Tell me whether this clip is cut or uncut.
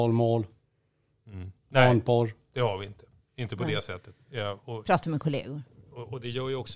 uncut